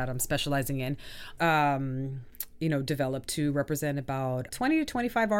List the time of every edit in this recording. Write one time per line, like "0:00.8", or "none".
0:01.4
0:04.5